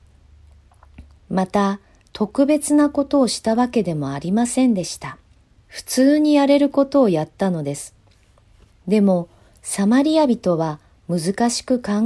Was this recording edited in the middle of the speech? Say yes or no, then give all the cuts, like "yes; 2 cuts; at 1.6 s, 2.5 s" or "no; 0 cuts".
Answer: yes; 3 cuts; at 1.2 s, 5.6 s, 8.8 s